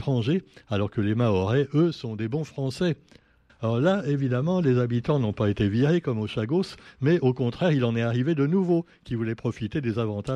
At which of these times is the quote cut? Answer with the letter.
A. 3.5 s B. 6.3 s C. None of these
A